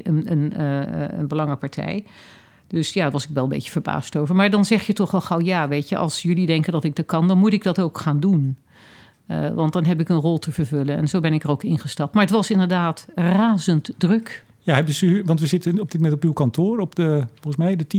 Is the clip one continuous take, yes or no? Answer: yes